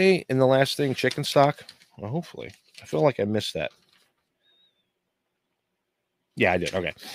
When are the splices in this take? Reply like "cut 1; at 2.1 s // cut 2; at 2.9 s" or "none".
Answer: none